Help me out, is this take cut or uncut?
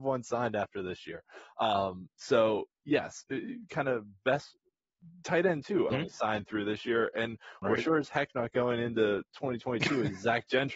cut